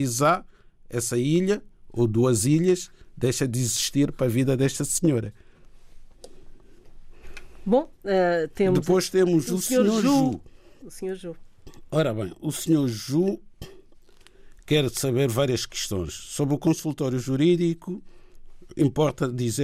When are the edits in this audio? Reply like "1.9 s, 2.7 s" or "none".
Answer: none